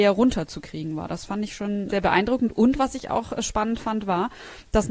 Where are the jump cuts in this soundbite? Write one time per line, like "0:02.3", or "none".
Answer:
0:01.9